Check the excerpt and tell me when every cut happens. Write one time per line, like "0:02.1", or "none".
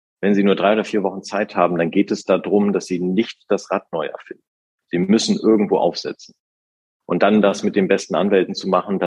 none

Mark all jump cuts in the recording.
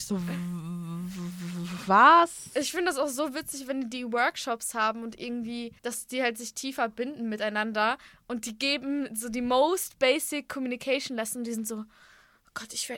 0:05.8

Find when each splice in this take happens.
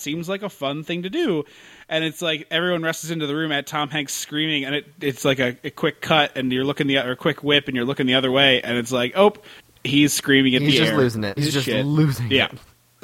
0:09.7
0:11.4

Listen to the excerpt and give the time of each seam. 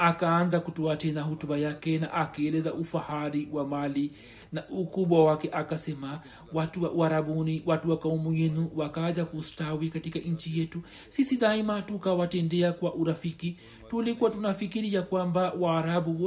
none

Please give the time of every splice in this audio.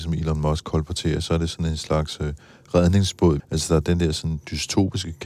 0:03.4

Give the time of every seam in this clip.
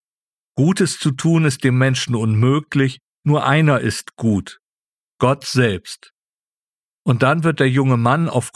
0:06.9

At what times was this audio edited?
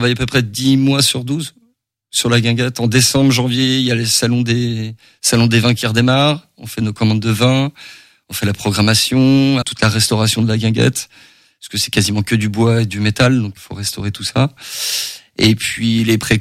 0:09.6
0:13.6

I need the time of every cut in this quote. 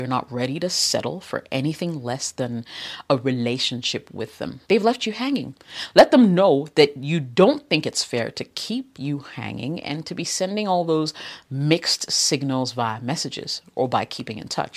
0:04.6

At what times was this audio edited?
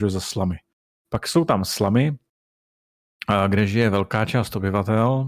0:01.0

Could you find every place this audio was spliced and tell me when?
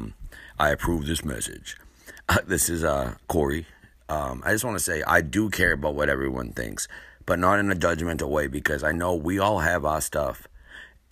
none

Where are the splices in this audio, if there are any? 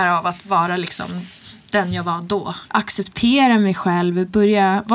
0:02.7

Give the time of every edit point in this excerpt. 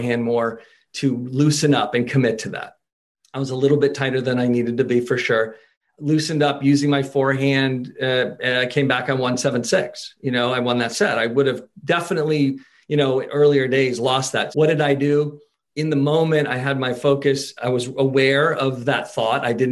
0:14.5

